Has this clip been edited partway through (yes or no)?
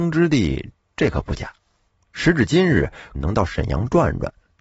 yes